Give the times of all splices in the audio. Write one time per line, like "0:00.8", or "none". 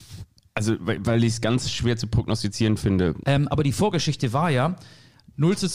0:03.2